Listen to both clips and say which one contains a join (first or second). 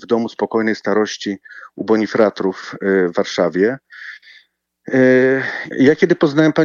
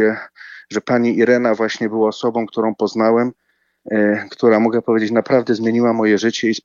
first